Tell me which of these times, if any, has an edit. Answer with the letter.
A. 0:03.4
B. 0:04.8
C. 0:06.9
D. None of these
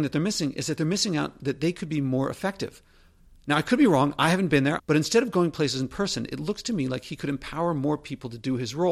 B